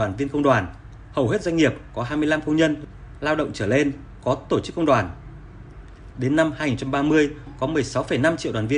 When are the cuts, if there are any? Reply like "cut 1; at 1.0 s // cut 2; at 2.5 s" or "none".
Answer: cut 1; at 6.1 s